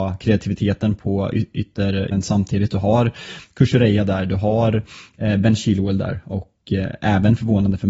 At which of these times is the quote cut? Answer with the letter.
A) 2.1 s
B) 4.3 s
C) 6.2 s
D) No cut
A